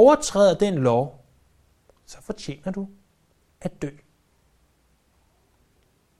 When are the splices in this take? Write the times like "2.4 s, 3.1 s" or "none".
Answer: none